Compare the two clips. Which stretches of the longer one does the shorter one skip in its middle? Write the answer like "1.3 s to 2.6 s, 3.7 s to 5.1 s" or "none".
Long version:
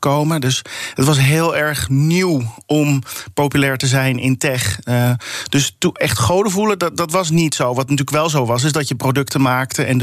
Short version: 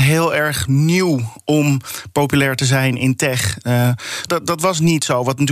5.5 s to 6.8 s